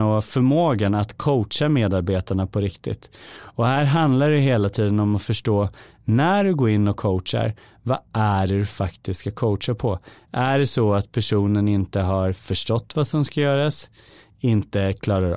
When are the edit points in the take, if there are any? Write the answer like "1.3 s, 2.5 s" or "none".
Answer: none